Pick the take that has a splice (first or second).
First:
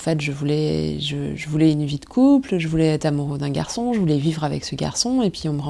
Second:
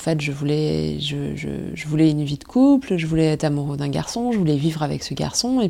first